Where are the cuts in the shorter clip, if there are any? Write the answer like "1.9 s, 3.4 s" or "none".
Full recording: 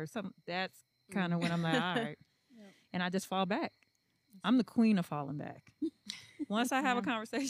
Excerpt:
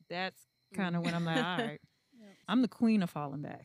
2.4 s